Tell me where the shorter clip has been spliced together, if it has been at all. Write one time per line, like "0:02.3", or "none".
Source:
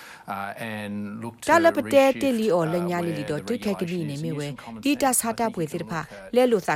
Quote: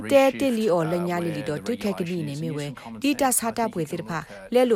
none